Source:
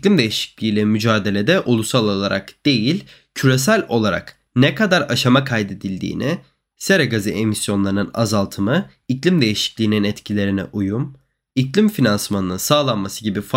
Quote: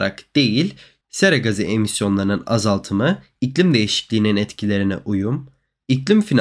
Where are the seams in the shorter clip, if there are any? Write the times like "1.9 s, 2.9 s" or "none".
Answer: 1.0 s